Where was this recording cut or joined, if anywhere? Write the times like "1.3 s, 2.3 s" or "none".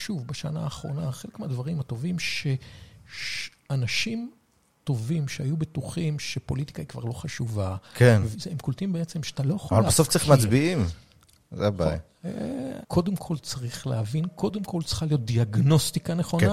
8.3 s, 12.8 s

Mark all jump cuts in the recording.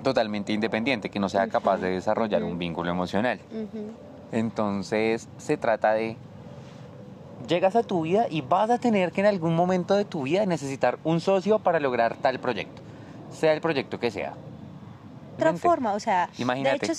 4.3 s, 15.4 s

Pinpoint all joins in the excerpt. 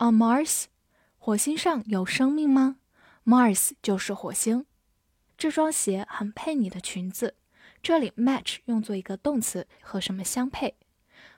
5.3 s, 9.8 s

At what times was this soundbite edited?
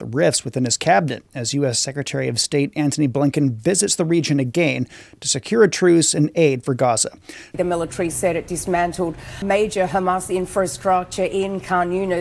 7.5 s

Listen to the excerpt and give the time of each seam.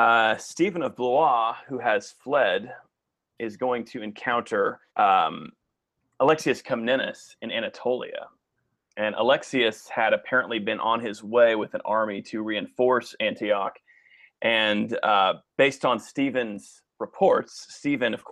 4.9 s, 15.5 s

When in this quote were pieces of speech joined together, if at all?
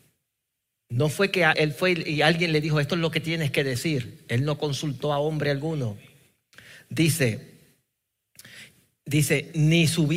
1.5 s

